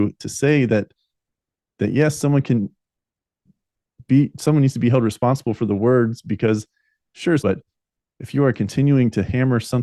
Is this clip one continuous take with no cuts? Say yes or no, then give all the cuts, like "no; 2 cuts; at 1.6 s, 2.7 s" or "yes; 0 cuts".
no; 1 cut; at 7.4 s